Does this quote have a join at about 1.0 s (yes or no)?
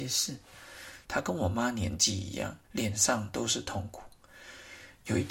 yes